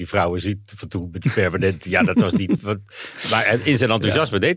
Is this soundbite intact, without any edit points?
yes; 0 cuts

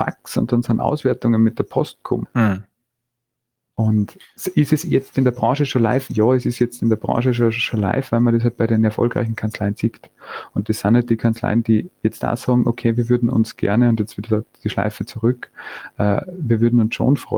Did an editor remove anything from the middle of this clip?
yes; 1 cut; at 2.2 s

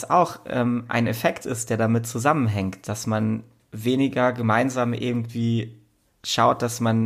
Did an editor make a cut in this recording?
no; 0 cuts

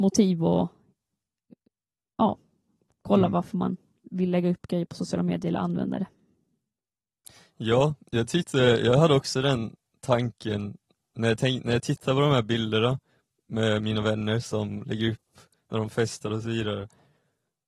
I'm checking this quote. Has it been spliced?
no; 0 cuts

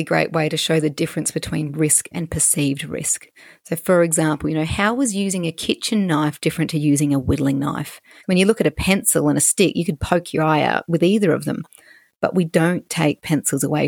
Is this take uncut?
no; 1 cut; at 8.2 s

